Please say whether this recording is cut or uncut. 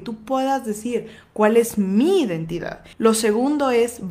cut